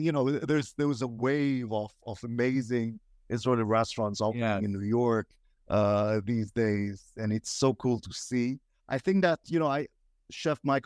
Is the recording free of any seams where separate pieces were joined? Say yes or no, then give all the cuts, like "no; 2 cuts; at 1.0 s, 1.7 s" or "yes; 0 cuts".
yes; 0 cuts